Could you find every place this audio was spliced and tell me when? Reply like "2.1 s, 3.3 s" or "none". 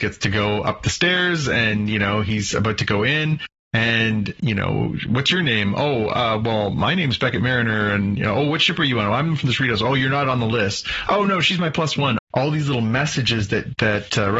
12.2 s